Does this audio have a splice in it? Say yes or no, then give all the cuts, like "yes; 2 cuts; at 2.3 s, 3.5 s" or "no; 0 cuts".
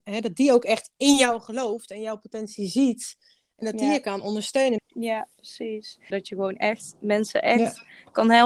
yes; 2 cuts; at 4.8 s, 6.1 s